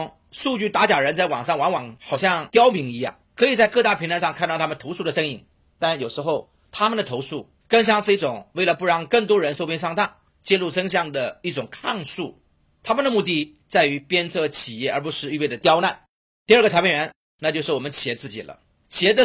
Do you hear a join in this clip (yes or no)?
no